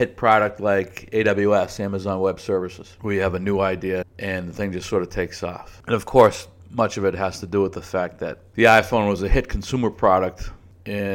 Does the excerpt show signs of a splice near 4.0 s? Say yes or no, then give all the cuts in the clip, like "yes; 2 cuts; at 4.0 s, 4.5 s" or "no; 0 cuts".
yes; 2 cuts; at 4.0 s, 5.8 s